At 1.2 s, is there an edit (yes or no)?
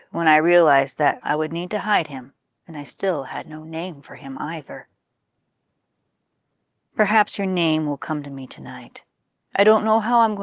yes